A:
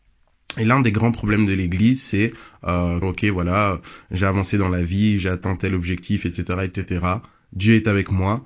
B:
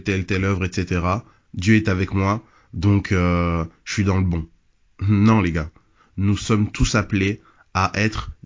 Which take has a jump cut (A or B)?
A